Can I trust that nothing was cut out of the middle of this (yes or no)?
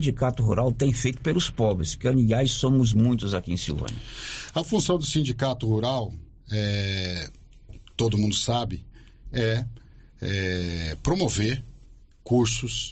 yes